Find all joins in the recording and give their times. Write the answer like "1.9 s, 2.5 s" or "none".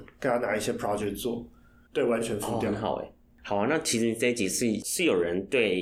1.9 s

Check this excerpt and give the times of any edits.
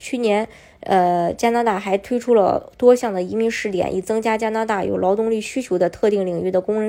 none

